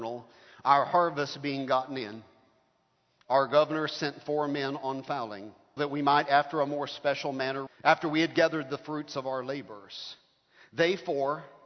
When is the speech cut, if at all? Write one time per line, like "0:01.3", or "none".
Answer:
0:05.8
0:07.7